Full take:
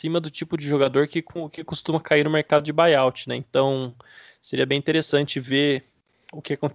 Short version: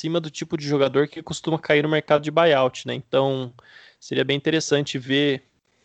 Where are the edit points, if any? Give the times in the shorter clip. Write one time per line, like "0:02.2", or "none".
0:01.1